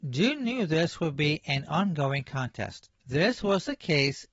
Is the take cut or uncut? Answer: cut